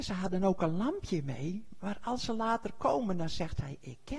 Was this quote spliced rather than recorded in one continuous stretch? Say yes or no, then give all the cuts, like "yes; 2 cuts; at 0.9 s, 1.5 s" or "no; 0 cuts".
no; 0 cuts